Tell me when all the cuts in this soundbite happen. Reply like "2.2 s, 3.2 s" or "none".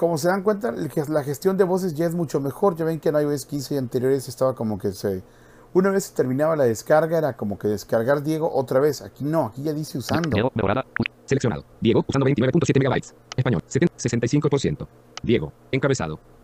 12.1 s